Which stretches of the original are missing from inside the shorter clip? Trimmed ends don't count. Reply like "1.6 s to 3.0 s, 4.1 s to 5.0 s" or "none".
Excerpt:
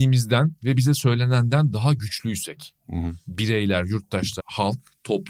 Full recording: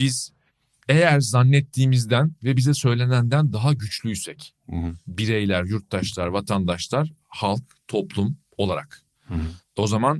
6.2 s to 7.2 s